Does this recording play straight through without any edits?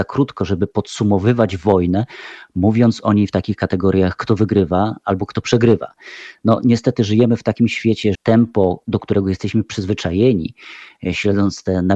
no; 1 cut; at 8.1 s

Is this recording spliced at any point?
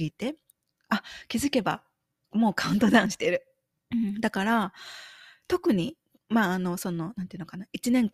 yes; 1 cut; at 3.7 s

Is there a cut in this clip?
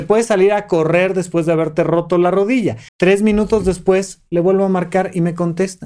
yes; 1 cut; at 2.9 s

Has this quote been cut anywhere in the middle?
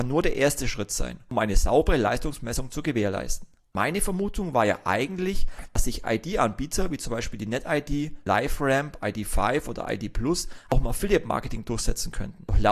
no; 0 cuts

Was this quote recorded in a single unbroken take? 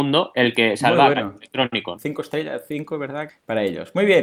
no; 2 cuts; at 2.0 s, 3.3 s

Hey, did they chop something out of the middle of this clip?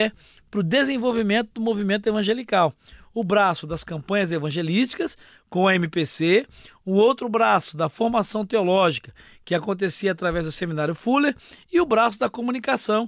no; 0 cuts

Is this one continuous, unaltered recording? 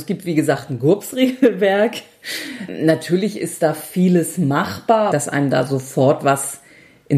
no; 1 cut; at 5.1 s

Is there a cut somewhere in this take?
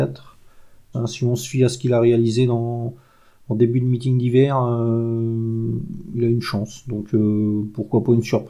yes; 1 cut; at 0.9 s

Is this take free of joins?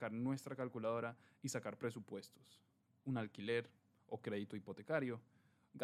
no; 1 cut; at 3.0 s

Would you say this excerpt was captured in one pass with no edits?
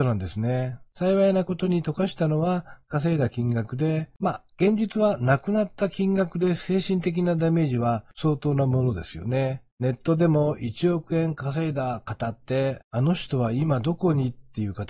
no; 2 cuts; at 0.9 s, 4.2 s

